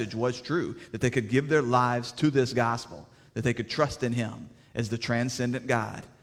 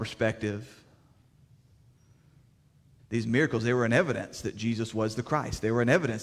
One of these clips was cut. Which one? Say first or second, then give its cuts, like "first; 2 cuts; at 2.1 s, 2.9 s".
second; 1 cut; at 3.0 s